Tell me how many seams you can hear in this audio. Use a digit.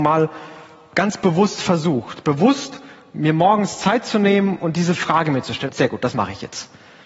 1